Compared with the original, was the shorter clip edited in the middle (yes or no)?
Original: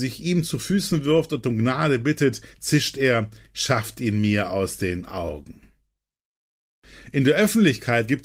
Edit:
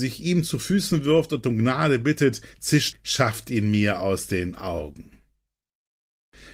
yes